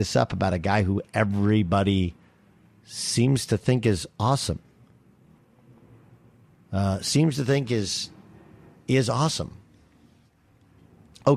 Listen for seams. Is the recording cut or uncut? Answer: uncut